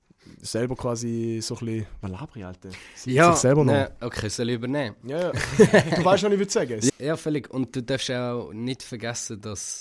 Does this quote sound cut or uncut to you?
cut